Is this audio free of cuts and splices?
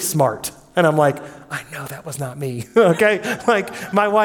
yes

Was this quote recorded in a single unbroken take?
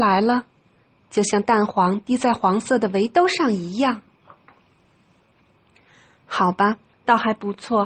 no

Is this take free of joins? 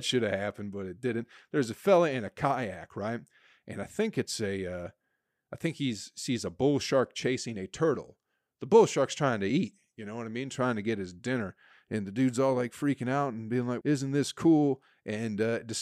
no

